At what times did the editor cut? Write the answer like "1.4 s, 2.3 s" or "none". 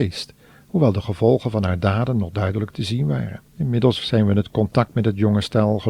3.5 s